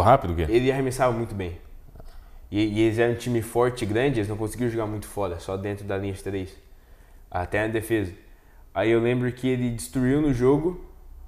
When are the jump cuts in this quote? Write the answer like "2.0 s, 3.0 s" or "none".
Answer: none